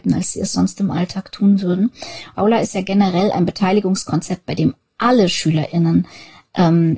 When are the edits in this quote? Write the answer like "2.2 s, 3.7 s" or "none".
2.3 s